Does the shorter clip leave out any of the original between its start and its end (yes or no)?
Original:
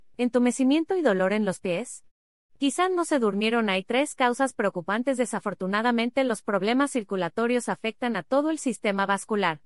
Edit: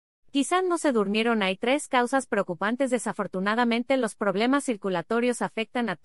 no